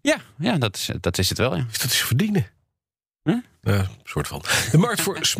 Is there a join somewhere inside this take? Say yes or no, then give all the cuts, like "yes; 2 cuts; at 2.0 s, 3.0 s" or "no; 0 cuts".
no; 0 cuts